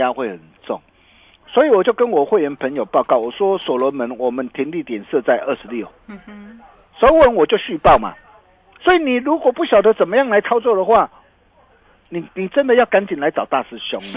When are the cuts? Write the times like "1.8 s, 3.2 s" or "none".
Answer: 8.8 s